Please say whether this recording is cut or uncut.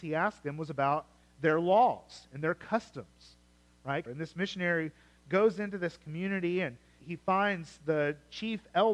cut